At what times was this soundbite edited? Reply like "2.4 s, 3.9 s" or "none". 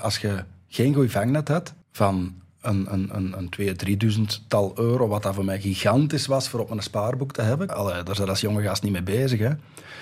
1.8 s, 7.7 s